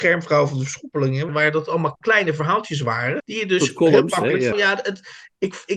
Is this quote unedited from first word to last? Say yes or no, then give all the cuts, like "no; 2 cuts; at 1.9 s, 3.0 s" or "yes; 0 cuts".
no; 3 cuts; at 1.3 s, 3.2 s, 4.5 s